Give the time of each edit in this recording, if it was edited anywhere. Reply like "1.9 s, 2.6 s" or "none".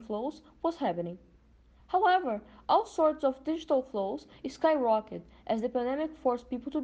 none